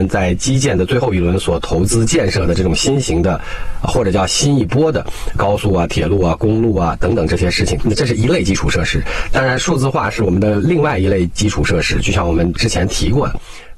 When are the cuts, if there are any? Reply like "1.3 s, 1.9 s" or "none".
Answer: 7.8 s